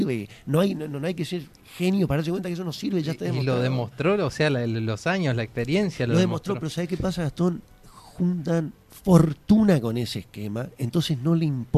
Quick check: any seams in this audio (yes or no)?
no